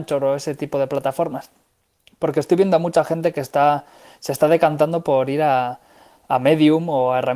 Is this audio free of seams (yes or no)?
yes